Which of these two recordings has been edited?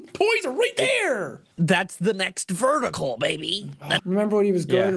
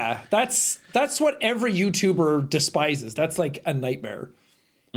first; 2 cuts; at 1.5 s, 4.0 s

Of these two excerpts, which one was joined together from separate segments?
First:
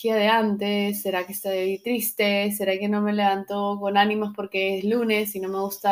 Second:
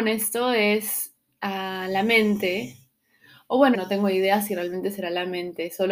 second; 1 cut; at 3.7 s

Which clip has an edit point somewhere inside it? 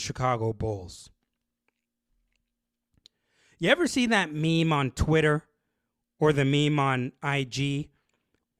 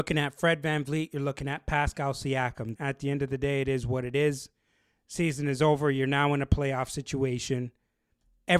second; 1 cut; at 2.7 s

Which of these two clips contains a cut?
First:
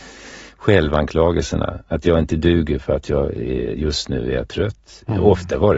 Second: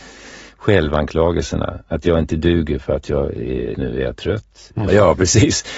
second; 2 cuts; at 3.7 s, 4.9 s

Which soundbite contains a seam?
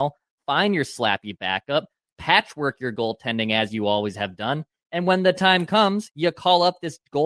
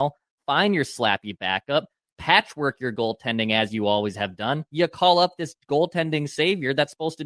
second; 1 cut; at 4.7 s

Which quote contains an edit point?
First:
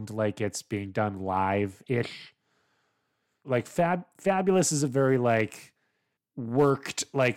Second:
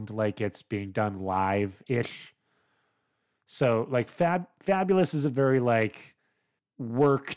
first; 1 cut; at 3.4 s

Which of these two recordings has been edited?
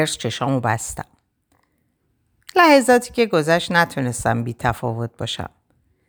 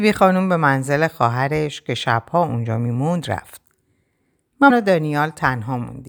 second; 1 cut; at 4.7 s

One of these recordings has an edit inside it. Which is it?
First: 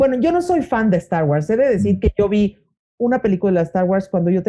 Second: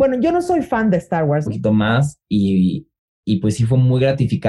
second; 1 cut; at 1.5 s

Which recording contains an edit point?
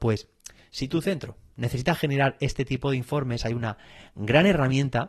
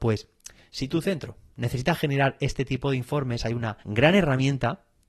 second; 1 cut; at 3.8 s

